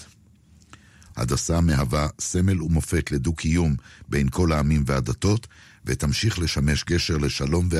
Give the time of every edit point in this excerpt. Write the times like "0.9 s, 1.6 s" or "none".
1.1 s